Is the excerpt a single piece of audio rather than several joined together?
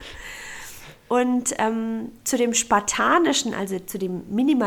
yes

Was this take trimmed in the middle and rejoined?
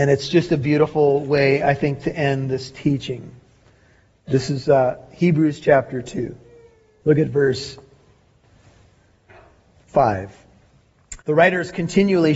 yes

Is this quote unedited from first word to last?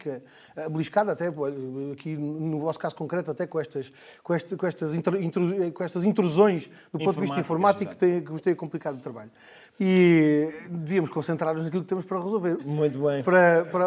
no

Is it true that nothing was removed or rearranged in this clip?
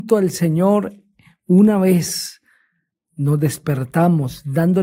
yes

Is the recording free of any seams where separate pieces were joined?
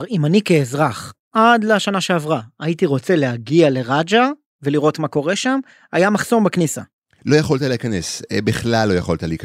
yes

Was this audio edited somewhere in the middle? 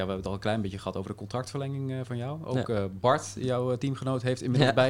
no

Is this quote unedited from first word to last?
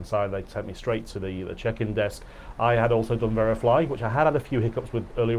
yes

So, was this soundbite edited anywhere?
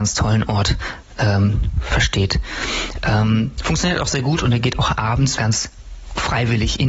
yes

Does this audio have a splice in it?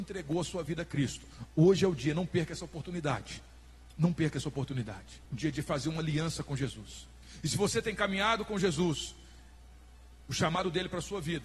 yes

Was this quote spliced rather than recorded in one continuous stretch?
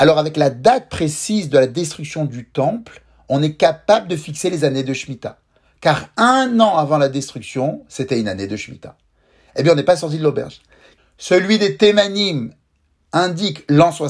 yes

